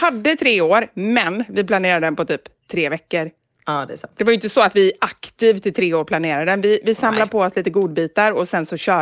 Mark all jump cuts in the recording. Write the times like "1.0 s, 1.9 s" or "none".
none